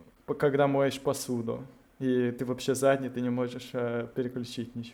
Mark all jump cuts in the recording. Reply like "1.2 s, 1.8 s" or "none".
none